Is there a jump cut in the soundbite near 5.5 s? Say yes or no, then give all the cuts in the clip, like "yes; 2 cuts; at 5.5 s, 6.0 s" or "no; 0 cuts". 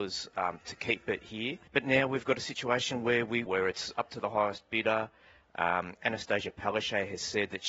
no; 2 cuts; at 1.7 s, 3.5 s